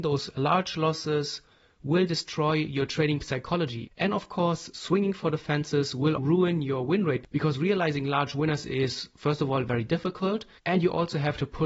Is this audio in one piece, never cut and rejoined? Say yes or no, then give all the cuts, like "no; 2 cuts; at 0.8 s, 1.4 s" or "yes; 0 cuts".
no; 2 cuts; at 3.9 s, 6.2 s